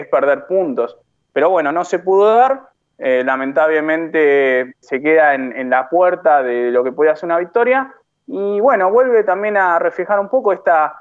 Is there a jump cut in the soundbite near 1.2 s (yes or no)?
yes